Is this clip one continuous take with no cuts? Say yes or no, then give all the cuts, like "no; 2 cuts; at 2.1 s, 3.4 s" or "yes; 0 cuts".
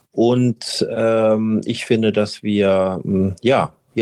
yes; 0 cuts